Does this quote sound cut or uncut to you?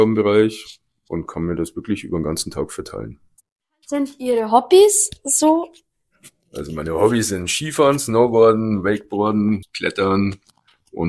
cut